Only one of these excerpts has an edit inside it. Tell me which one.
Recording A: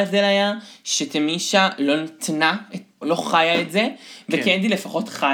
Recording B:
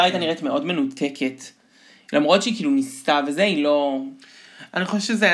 A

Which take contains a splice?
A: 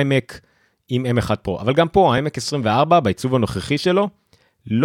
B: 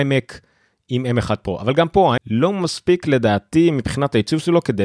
B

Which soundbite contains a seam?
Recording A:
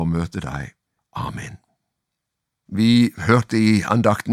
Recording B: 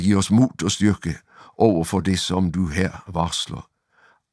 A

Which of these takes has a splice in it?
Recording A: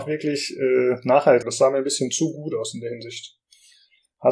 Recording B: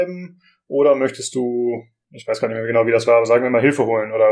A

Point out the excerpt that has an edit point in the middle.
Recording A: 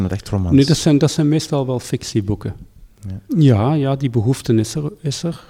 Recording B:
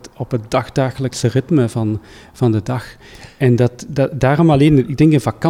A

